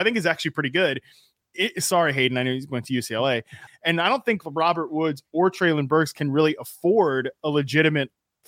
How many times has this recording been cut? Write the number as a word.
one